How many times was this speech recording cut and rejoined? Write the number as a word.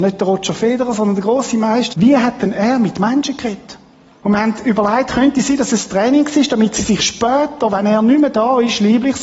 two